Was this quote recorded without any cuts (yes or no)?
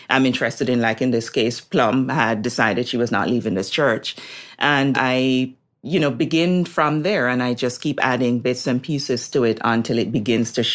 yes